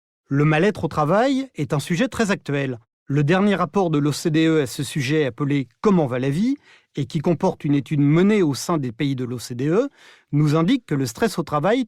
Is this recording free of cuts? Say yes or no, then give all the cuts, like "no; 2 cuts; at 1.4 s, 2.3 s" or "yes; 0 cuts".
yes; 0 cuts